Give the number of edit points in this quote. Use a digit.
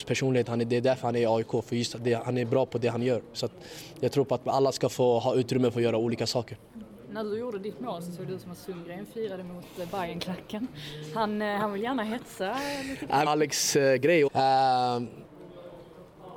2